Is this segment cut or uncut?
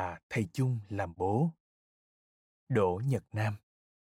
cut